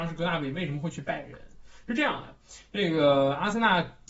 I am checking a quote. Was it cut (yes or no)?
no